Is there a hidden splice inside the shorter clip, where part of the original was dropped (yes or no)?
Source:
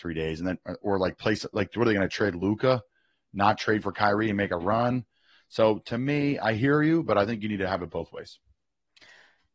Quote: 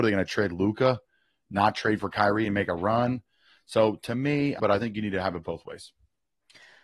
yes